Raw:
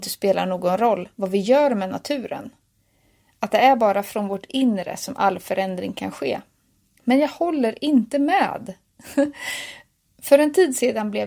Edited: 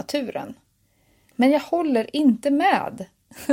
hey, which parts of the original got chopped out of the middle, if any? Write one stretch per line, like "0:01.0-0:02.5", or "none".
0:03.3-0:07.0